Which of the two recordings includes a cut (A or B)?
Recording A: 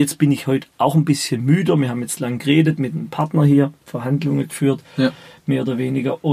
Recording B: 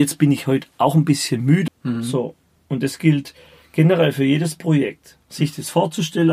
B